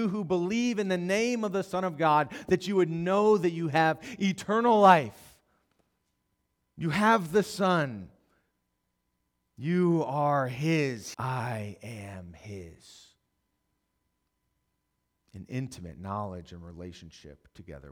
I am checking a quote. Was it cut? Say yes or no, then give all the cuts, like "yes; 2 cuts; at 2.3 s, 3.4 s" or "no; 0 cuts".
yes; 1 cut; at 11.1 s